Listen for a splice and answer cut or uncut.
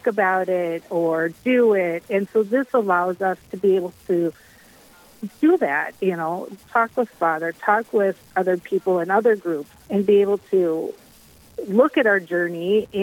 cut